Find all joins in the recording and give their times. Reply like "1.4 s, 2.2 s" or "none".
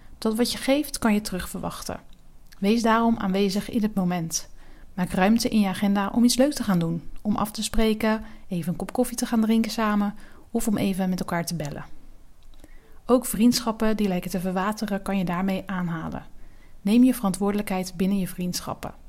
none